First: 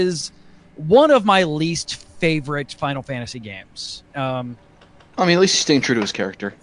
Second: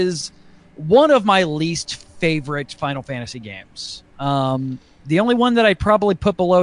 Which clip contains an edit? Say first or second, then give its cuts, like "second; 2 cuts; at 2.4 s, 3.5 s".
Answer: first; 1 cut; at 4.1 s